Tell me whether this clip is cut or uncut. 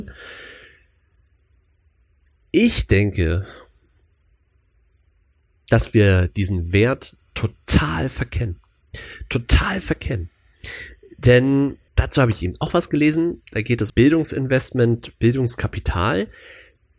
cut